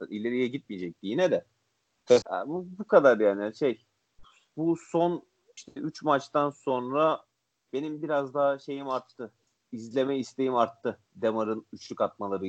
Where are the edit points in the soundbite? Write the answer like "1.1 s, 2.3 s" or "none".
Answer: 2.2 s